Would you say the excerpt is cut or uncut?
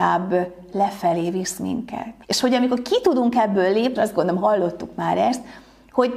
cut